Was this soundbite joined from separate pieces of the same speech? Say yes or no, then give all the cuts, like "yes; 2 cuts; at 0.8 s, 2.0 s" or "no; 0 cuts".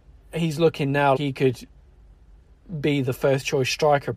yes; 1 cut; at 1.2 s